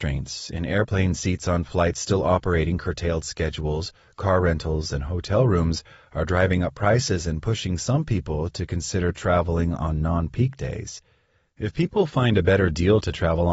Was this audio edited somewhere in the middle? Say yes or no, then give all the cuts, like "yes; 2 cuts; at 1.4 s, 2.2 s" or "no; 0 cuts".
no; 0 cuts